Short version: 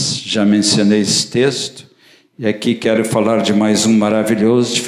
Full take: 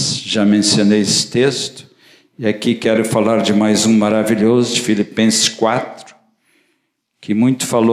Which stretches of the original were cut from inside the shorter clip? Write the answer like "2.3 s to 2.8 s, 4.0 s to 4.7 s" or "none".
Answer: none

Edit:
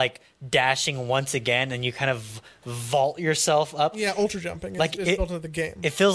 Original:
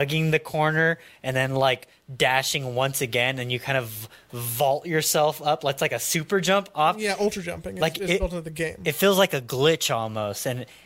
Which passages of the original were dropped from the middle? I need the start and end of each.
5.6 s to 6.9 s

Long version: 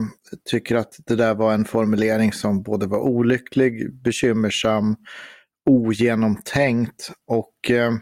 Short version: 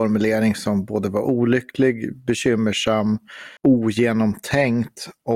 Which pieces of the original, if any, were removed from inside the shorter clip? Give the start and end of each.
5.3 s to 5.6 s

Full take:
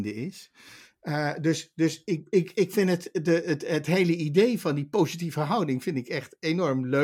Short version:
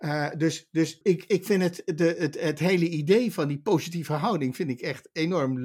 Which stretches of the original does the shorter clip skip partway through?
2.0 s to 2.3 s

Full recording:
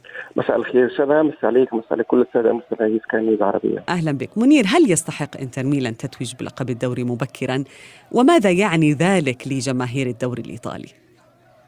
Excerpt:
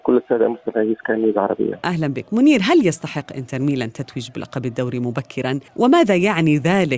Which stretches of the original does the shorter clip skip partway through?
7.7 s to 8.0 s

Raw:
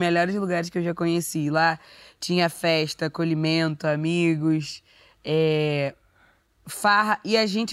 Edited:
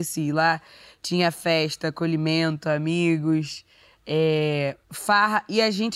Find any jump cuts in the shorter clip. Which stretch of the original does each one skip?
6.0 s to 6.6 s

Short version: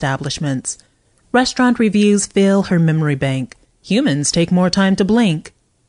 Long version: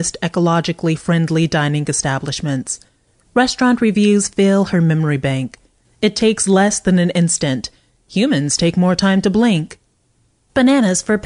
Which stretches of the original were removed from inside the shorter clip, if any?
5.7 s to 7.9 s

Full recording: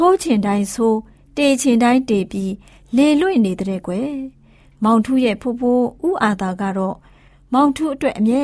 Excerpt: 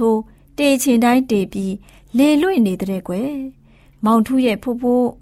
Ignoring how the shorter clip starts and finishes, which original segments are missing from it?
none

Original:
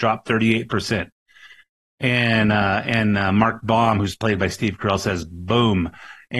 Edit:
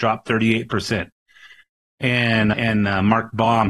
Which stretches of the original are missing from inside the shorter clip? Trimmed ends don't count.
2.5 s to 2.8 s

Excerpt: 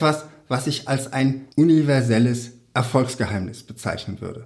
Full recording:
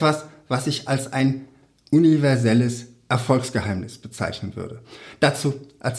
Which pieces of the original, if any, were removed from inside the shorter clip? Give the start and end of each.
1.5 s to 1.9 s

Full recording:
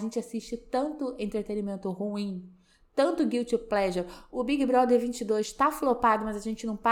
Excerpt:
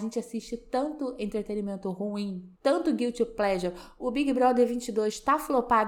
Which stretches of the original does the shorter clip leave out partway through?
2.5 s to 2.9 s

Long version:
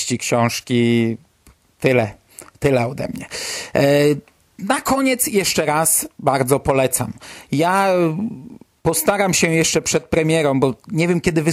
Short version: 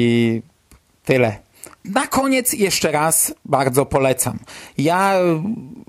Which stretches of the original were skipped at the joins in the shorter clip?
2.5 s to 4.5 s

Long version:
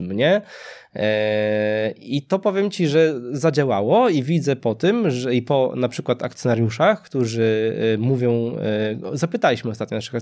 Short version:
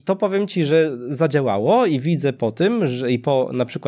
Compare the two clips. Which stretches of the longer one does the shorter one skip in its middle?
none

